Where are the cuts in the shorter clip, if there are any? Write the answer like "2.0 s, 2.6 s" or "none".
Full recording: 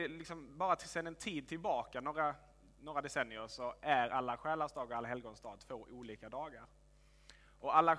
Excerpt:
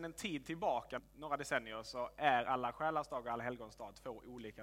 1.0 s